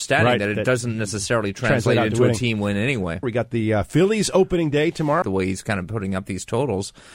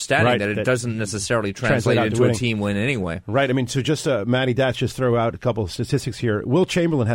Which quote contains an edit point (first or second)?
first